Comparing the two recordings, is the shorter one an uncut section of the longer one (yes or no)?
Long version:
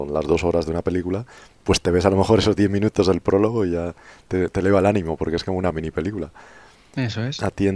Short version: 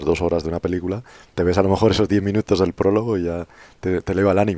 no